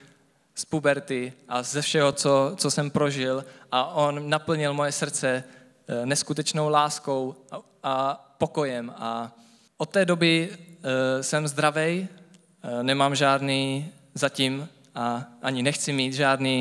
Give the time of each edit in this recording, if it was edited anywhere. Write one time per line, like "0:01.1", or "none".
none